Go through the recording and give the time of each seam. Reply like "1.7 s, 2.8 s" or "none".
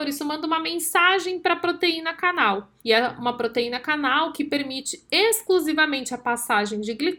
2.8 s